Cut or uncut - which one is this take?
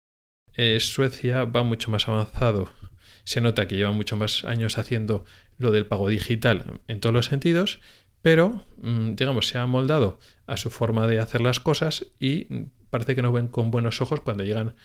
uncut